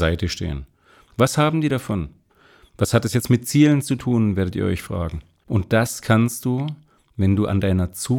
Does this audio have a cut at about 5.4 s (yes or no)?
yes